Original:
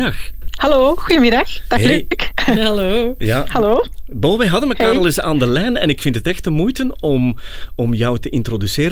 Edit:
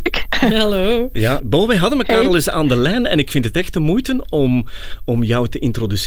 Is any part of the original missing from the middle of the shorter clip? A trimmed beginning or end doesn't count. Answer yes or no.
yes